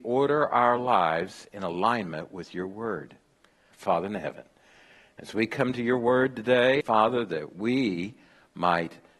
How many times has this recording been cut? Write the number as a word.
two